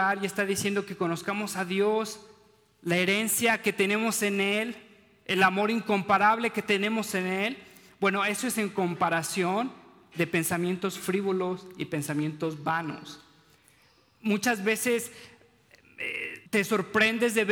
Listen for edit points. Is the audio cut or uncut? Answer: cut